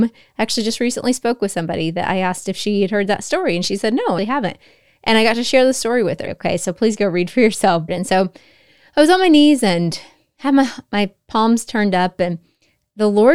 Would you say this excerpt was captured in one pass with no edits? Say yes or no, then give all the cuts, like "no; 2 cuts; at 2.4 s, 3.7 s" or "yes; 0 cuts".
no; 3 cuts; at 4.2 s, 6.3 s, 7.9 s